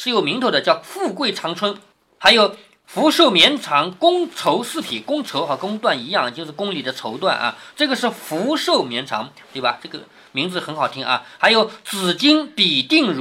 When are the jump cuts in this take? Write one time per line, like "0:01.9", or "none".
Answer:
0:09.4